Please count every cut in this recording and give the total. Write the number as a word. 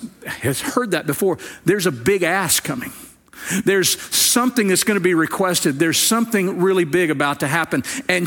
zero